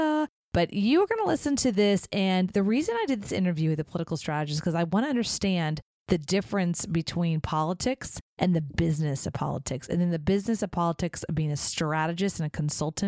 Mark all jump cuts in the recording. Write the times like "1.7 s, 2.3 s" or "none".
none